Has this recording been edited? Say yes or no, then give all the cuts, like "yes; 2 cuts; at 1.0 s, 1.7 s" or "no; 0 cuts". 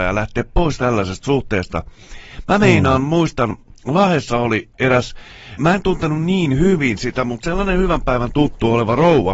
yes; 1 cut; at 5.6 s